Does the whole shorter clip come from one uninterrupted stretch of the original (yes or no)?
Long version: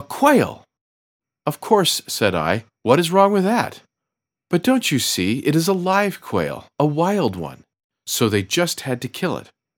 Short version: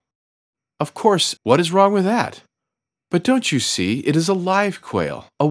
no